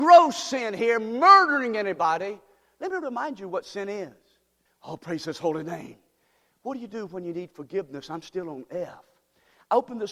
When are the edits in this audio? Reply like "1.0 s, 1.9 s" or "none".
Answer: 4.6 s